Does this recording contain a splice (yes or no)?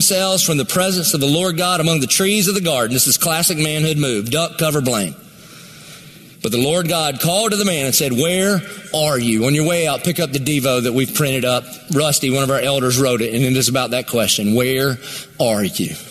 no